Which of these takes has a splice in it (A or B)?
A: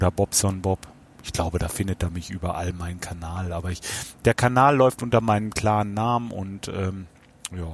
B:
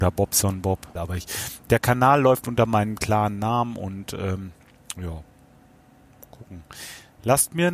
B